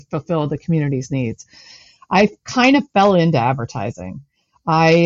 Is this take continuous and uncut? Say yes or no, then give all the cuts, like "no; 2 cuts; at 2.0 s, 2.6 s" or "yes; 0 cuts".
yes; 0 cuts